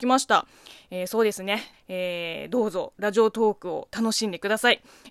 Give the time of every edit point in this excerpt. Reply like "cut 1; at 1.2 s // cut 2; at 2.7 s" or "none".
cut 1; at 1.7 s